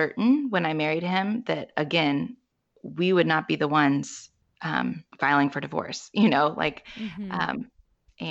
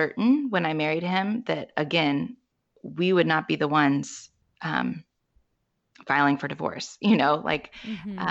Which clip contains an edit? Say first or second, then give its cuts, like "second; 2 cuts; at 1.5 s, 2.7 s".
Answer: first; 1 cut; at 5.1 s